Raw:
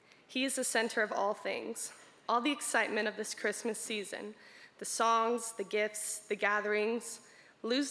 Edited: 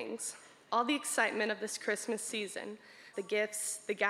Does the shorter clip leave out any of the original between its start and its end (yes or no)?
yes